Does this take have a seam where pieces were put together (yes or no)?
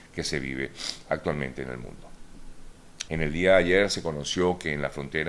yes